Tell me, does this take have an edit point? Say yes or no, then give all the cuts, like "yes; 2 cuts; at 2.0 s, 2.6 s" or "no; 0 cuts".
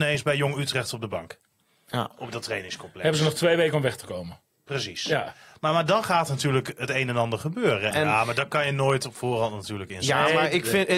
yes; 1 cut; at 7.9 s